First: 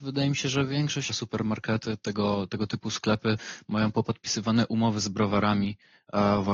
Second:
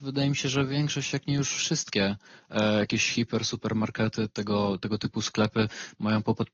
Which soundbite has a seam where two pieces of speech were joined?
first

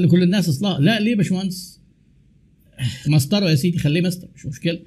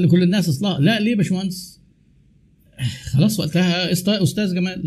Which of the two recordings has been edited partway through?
first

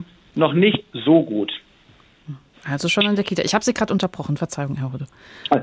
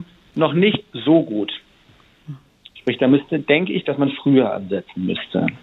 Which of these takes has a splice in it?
first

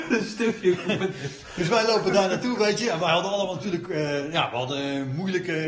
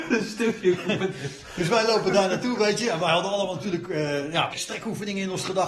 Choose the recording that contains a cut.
second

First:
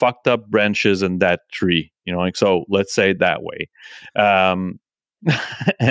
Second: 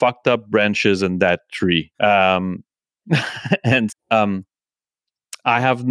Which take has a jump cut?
second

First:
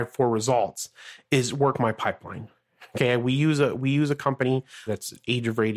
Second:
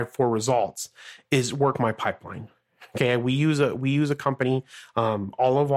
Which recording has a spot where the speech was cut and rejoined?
first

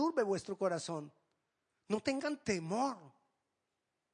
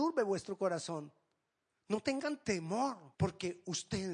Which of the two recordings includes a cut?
second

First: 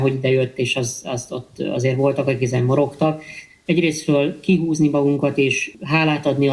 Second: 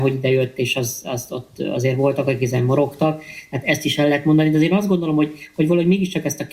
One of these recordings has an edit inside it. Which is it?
first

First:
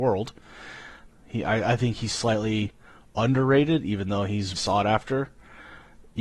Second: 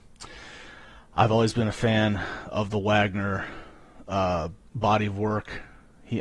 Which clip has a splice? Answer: first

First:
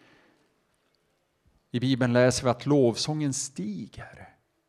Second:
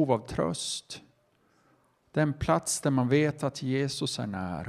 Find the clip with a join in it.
second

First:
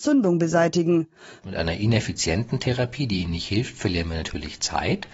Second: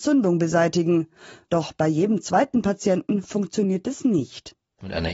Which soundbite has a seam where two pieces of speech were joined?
first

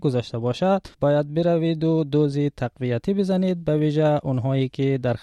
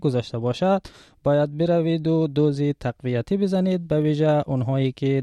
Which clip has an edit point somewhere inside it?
first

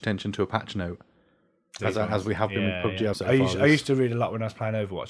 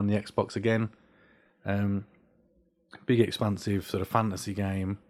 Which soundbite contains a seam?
first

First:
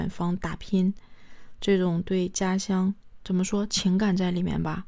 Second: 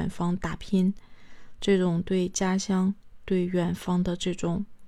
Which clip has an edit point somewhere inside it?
first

